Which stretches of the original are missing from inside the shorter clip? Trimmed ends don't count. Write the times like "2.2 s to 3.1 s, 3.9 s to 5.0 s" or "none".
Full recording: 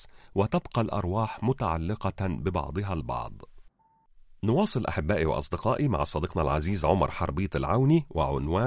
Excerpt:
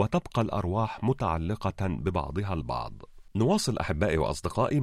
3.7 s to 4.4 s